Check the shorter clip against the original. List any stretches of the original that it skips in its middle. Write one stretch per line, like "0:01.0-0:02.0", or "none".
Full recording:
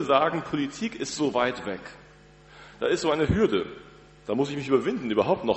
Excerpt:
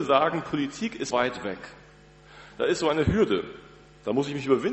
0:01.1-0:01.3